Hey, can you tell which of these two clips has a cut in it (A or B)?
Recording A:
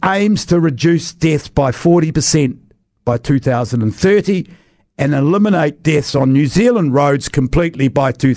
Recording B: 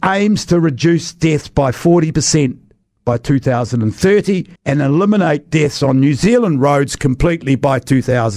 B